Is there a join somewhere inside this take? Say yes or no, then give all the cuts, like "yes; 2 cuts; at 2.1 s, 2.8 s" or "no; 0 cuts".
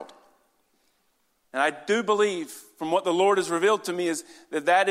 no; 0 cuts